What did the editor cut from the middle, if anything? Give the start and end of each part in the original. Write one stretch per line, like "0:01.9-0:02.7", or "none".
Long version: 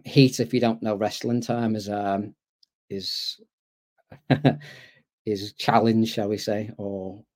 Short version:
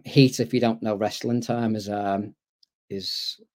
none